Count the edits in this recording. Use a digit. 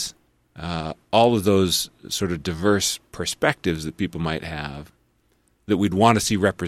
0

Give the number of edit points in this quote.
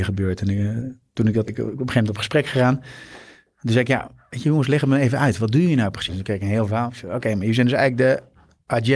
2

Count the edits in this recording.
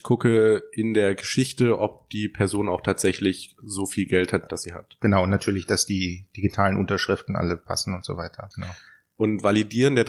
2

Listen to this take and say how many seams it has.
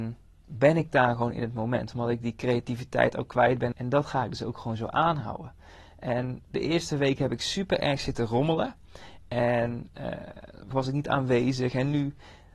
2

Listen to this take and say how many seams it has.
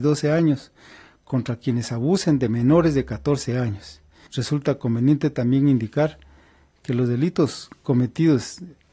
1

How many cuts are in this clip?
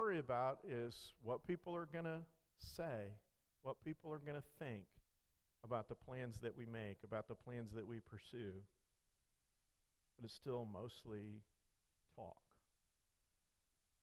0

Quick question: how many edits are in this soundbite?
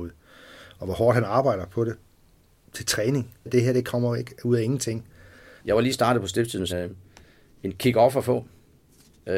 3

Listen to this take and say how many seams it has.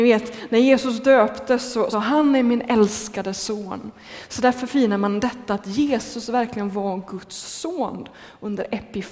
1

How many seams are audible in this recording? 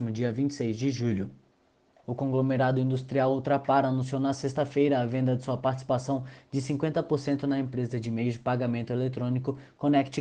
1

